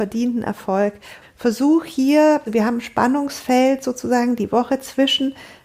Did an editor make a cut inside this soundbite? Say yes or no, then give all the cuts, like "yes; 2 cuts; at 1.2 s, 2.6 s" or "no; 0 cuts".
yes; 2 cuts; at 1.2 s, 2.5 s